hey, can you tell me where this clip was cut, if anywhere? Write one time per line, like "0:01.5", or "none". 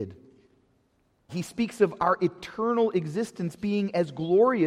0:01.3